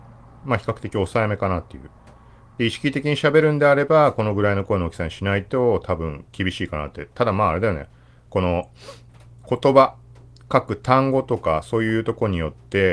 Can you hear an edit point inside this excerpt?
no; 0 cuts

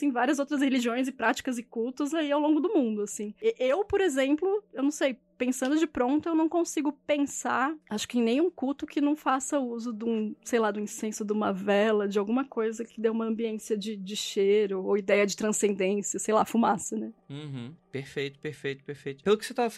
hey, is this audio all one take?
yes; 0 cuts

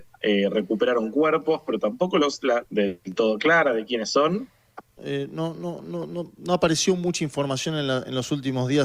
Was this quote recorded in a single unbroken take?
no; 2 cuts; at 2.6 s, 5.0 s

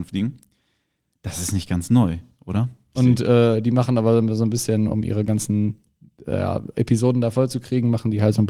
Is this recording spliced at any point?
yes; 1 cut; at 2.9 s

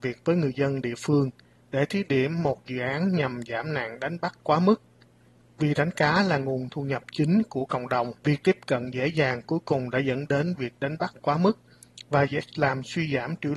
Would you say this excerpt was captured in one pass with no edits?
no; 2 cuts; at 5.4 s, 8.2 s

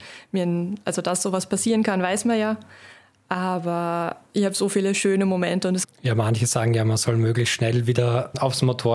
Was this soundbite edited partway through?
yes; 1 cut; at 5.8 s

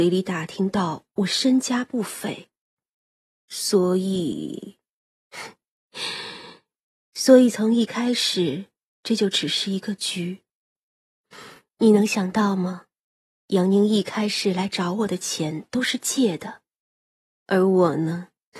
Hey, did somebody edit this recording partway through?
no; 0 cuts

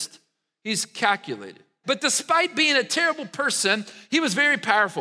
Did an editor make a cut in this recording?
yes; 1 cut; at 1.8 s

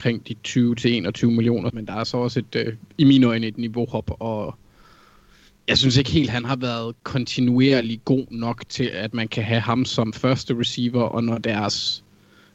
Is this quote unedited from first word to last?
no; 1 cut; at 1.7 s

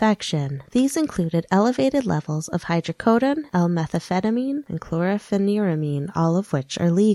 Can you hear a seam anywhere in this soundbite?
yes; 1 cut; at 3.5 s

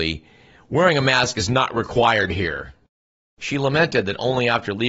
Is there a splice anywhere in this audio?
no; 0 cuts

